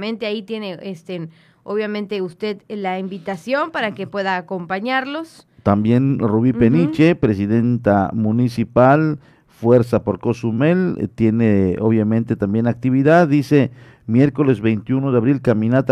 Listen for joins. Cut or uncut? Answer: uncut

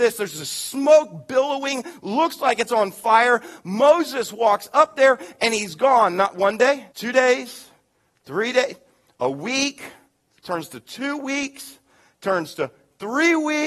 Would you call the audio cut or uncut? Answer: cut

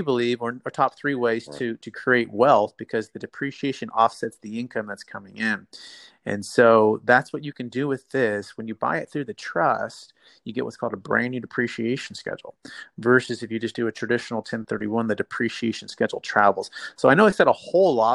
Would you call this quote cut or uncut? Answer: uncut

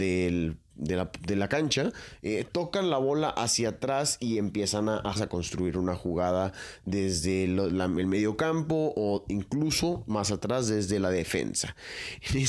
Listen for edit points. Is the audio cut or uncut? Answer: cut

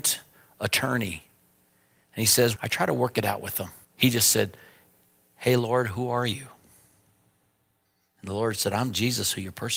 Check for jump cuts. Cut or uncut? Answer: cut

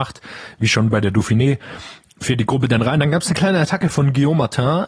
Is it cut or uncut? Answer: uncut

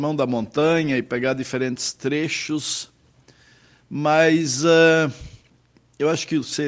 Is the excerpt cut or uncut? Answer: uncut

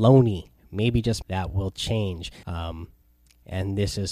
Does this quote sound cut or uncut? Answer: cut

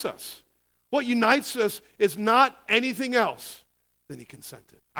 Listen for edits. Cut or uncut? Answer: cut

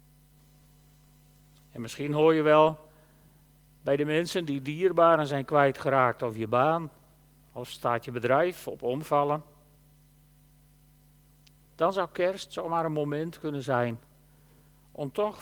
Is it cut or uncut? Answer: uncut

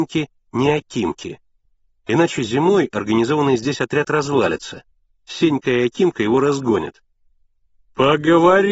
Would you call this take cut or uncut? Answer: uncut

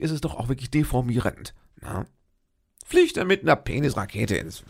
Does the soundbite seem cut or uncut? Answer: uncut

